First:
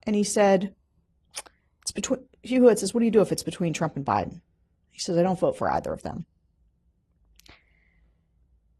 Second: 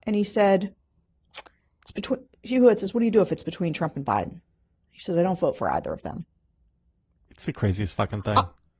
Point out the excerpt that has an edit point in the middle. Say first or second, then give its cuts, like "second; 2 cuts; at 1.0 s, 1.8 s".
second; 1 cut; at 7.3 s